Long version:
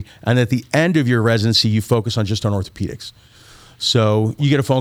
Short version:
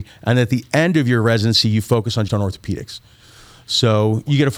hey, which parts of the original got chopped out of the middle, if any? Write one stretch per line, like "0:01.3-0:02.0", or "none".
0:02.3-0:02.4